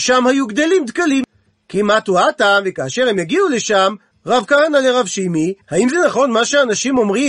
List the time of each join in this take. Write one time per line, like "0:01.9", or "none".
0:04.1
0:05.6